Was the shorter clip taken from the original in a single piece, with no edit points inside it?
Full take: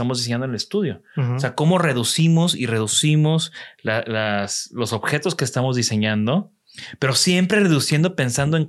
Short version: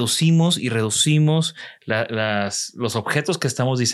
yes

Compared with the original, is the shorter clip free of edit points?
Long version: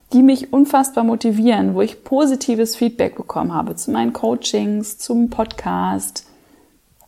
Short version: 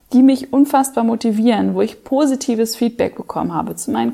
yes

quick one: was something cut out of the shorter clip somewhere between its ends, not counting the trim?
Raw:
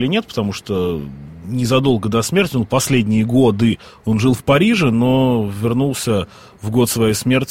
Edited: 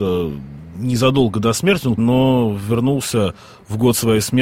yes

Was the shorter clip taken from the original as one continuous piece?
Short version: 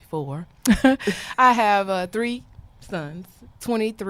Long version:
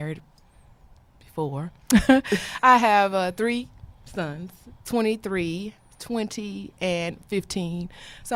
yes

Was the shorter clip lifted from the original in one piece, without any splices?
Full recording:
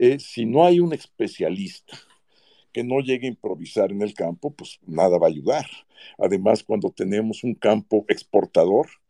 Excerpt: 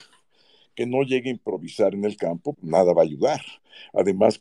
no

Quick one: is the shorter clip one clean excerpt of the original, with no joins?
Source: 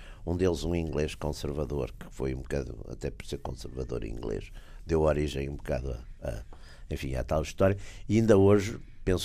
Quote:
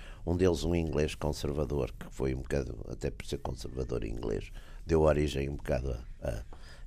yes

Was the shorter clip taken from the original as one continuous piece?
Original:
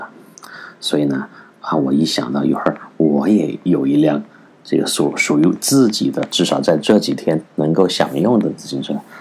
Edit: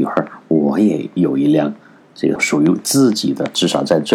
no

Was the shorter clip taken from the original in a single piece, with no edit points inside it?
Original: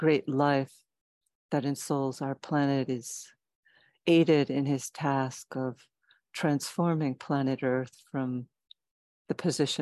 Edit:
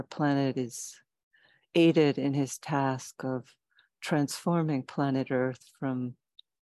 yes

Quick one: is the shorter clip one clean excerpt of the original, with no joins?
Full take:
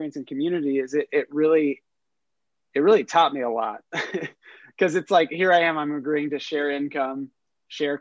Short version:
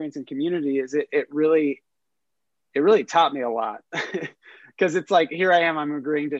yes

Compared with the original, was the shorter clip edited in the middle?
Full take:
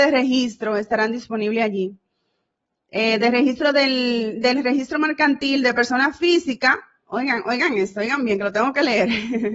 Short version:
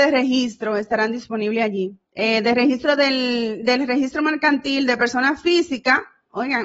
yes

